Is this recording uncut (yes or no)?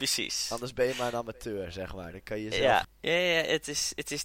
no